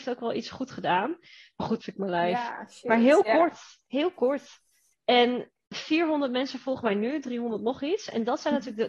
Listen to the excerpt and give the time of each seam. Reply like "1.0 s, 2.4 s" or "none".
1.8 s, 4.9 s